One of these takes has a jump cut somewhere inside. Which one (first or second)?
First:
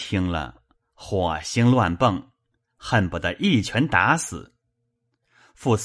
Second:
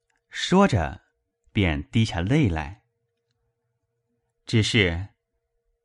second